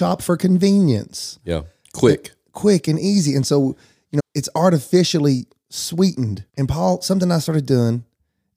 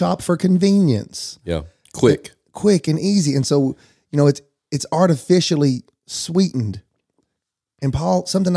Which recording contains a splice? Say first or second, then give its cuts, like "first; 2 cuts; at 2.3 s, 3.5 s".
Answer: first; 2 cuts; at 4.2 s, 6.5 s